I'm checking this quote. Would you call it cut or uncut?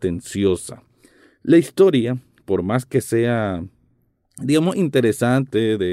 uncut